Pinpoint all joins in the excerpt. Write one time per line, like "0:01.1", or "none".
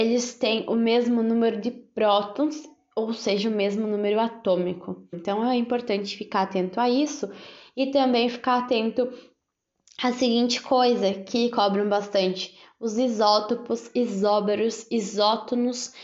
0:05.1